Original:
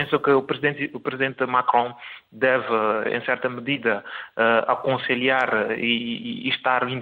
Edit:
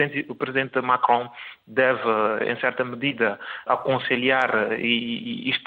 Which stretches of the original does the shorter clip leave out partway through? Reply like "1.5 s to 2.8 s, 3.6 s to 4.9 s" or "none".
4.3 s to 4.7 s